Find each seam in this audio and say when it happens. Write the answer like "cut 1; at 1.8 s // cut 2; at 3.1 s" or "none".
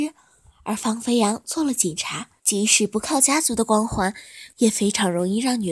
cut 1; at 2.4 s // cut 2; at 4.5 s